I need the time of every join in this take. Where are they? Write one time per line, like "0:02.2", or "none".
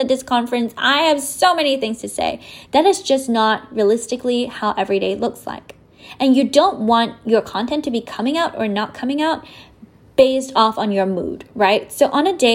none